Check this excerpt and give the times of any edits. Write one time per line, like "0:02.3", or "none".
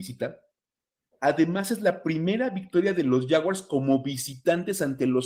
none

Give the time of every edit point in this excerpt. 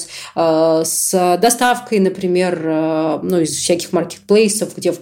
none

